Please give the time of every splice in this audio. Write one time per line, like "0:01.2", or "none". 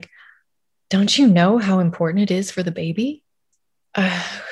0:03.5